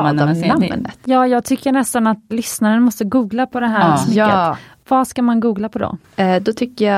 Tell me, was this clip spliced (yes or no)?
yes